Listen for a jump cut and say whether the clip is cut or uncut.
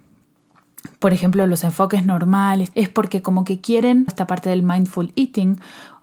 cut